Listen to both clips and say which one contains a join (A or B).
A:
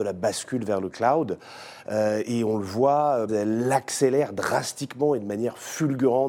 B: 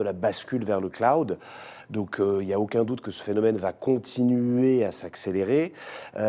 A